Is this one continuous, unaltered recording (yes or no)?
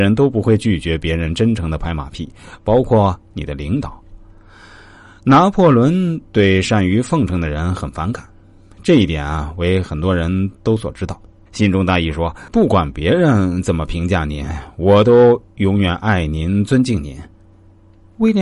no